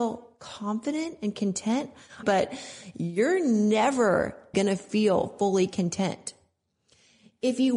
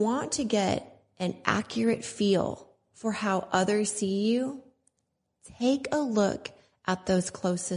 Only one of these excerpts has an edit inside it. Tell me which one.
first; 2 cuts; at 2.2 s, 4.5 s

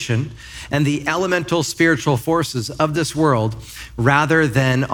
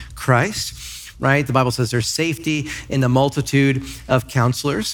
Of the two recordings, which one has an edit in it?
second; 1 cut; at 1.1 s

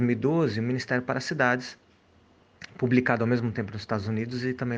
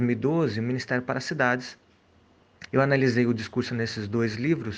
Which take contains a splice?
second; 1 cut; at 2.7 s

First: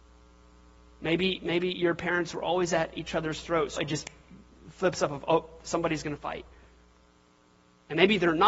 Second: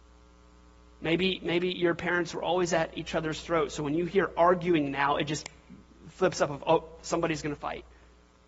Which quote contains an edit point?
first; 1 cut; at 3.8 s

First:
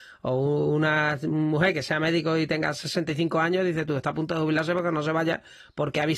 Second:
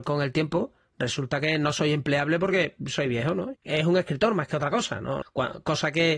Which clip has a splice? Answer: second; 2 cuts; at 3.5 s, 5.2 s

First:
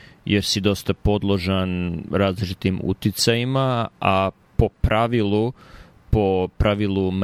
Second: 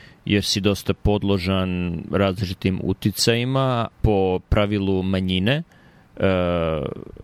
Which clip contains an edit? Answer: second; 1 cut; at 3.9 s

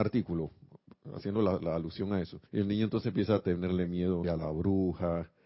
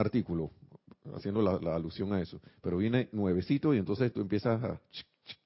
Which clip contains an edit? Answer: first; 2 cuts; at 2.5 s, 4.2 s

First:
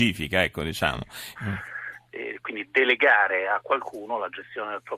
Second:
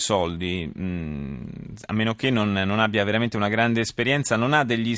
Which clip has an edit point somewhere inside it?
first; 1 cut; at 1.3 s

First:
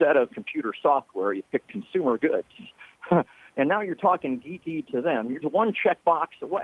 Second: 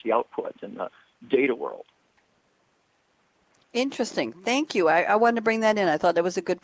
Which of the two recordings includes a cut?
first; 1 cut; at 5.4 s

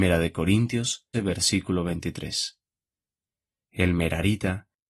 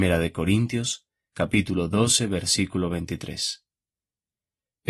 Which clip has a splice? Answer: first; 2 cuts; at 1.1 s, 3.6 s

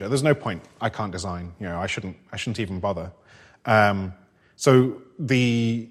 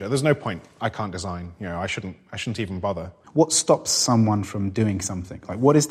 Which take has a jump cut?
second; 1 cut; at 3.2 s

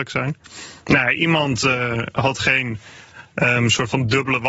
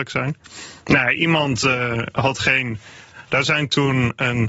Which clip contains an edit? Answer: second; 1 cut; at 3.3 s

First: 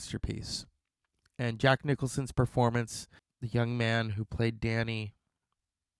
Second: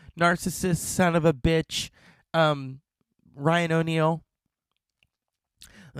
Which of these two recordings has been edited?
first; 1 cut; at 3.2 s

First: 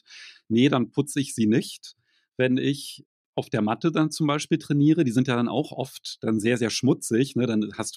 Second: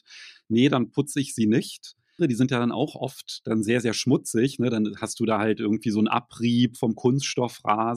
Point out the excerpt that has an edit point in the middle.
second; 1 cut; at 2.2 s

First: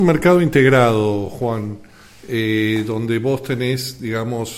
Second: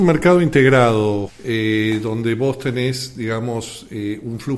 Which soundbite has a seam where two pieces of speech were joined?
second; 1 cut; at 1.3 s

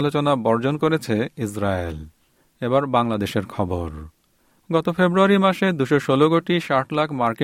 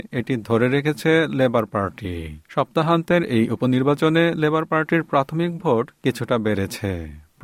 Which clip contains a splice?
second; 1 cut; at 2.4 s

